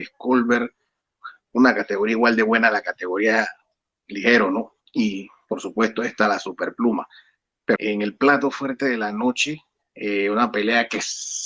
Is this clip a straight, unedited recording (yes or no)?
no